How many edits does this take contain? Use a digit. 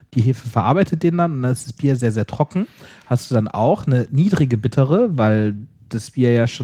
0